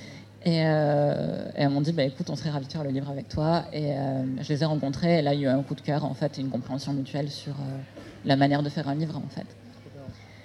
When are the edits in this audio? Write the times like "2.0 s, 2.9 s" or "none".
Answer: none